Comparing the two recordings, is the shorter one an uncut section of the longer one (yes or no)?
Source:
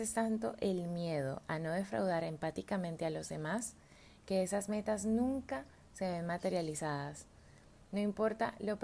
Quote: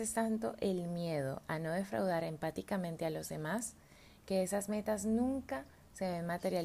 yes